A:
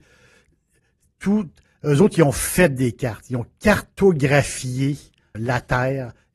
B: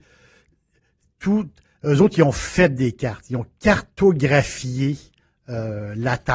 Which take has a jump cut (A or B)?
A